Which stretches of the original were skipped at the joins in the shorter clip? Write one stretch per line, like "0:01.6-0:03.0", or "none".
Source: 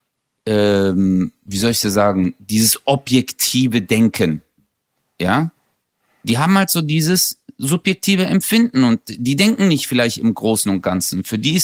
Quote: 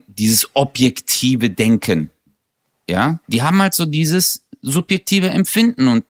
0:05.6-0:06.2